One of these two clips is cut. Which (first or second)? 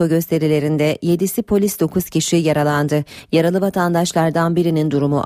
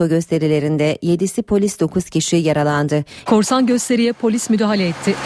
second